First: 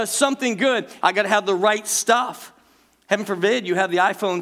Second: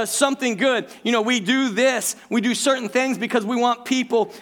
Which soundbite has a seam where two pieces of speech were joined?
first; 1 cut; at 1.0 s

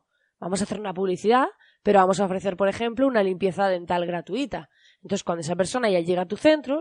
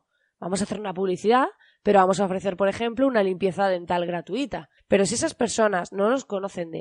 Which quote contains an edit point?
second; 1 cut; at 4.8 s

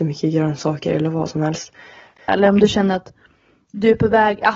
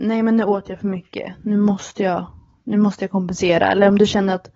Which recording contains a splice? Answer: first; 1 cut; at 2.3 s

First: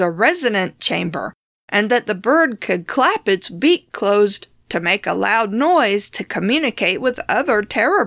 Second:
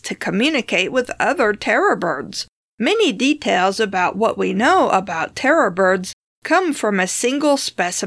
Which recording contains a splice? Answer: second; 1 cut; at 2.6 s

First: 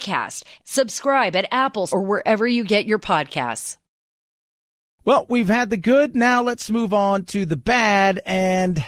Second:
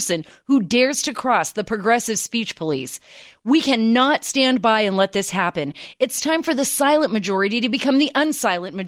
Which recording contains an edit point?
first; 1 cut; at 1.9 s

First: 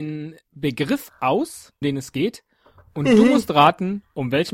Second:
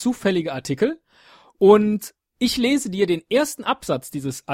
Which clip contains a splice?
first; 1 cut; at 1.8 s

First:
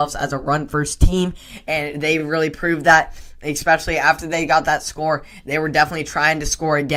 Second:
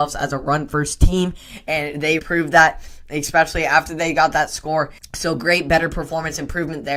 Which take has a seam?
second; 2 cuts; at 2.2 s, 5.0 s

